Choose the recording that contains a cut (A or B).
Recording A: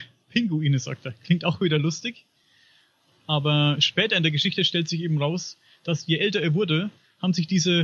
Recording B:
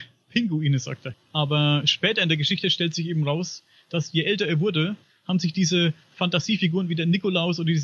B